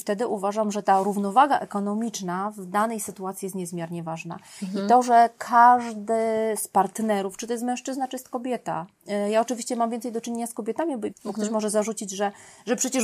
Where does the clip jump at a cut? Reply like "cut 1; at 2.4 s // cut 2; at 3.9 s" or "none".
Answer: cut 1; at 11.1 s

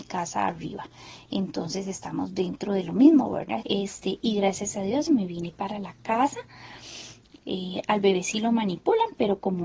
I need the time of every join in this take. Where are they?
cut 1; at 3.6 s // cut 2; at 5.1 s // cut 3; at 7.4 s

